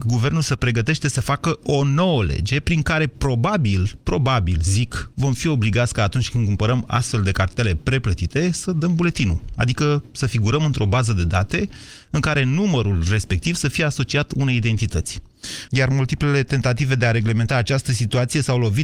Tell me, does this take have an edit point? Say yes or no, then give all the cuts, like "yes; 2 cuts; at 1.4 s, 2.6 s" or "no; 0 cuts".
yes; 1 cut; at 15.7 s